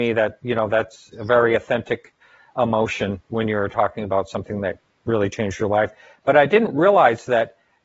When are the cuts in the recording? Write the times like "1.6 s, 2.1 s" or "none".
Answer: none